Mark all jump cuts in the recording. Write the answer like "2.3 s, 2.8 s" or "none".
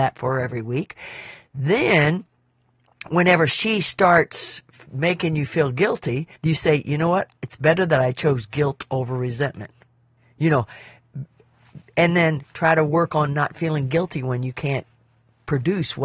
6.4 s